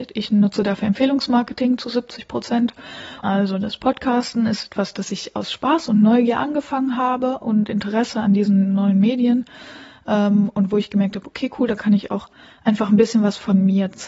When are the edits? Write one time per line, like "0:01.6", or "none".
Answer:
0:03.2